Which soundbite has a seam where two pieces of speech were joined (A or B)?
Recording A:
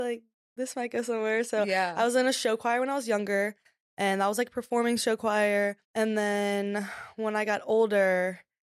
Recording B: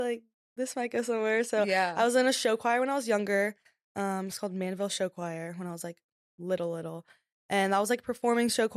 A